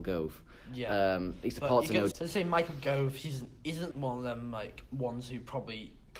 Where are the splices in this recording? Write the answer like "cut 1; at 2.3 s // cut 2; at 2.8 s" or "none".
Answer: cut 1; at 2.1 s // cut 2; at 3.9 s

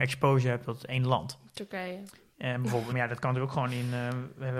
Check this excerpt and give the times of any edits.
cut 1; at 2.9 s

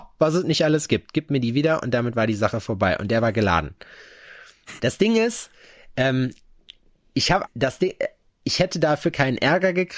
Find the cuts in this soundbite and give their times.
cut 1; at 4.8 s // cut 2; at 7.5 s

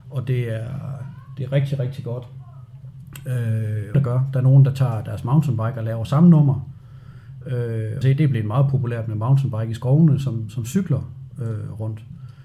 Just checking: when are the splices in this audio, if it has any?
cut 1; at 3.9 s // cut 2; at 8.0 s // cut 3; at 10.2 s

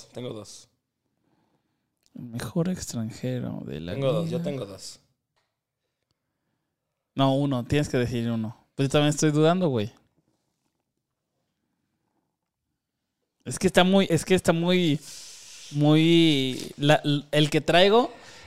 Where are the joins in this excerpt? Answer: cut 1; at 14.1 s

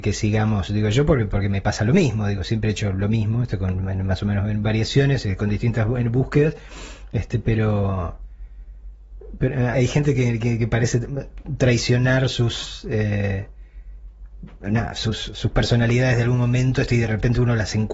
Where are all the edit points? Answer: cut 1; at 9.7 s

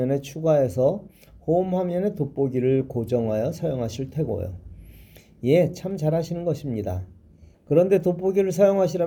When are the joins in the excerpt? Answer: cut 1; at 7.5 s

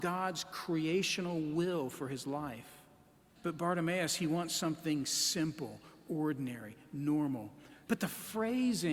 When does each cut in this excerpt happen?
cut 1; at 3.4 s // cut 2; at 7.9 s

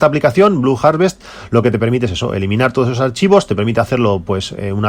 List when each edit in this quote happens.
none

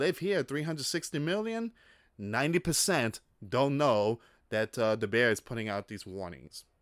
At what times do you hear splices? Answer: none

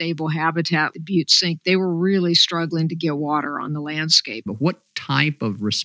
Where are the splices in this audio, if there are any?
cut 1; at 0.9 s // cut 2; at 4.5 s

